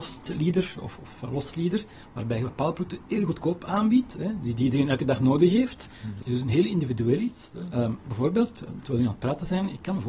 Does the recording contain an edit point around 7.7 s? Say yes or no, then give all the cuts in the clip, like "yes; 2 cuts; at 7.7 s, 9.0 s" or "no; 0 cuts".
yes; 2 cuts; at 6.2 s, 7.7 s